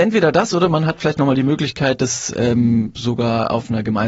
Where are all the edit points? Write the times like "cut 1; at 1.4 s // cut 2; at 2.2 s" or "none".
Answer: none